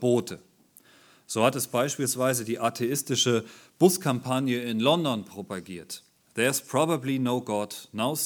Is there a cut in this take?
no; 0 cuts

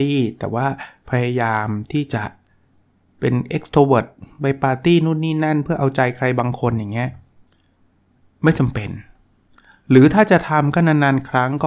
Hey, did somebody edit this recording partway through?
no; 0 cuts

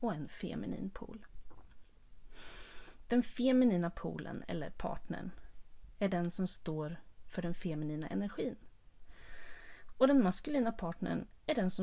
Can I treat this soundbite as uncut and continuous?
yes; 0 cuts

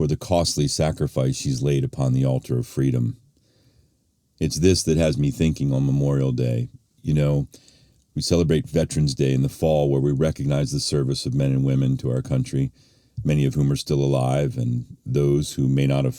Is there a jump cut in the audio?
no; 0 cuts

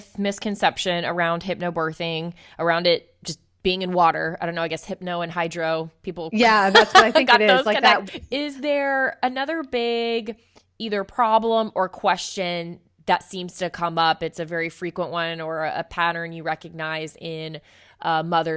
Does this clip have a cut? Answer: yes; 1 cut; at 8.1 s

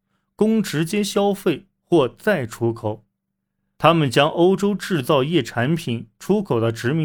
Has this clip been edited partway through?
yes; 1 cut; at 3.8 s

